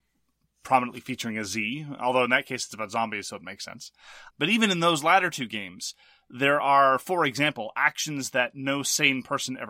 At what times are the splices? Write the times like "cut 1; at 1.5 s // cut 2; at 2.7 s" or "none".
cut 1; at 4.3 s